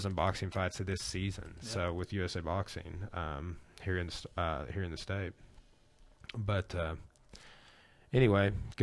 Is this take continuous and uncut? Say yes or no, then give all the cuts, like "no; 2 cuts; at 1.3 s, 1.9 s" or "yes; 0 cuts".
yes; 0 cuts